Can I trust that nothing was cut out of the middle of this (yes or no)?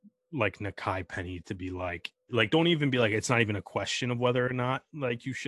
no